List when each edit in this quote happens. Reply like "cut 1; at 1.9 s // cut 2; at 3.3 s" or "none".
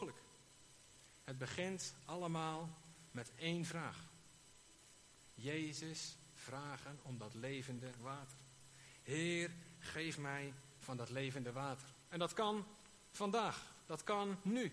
none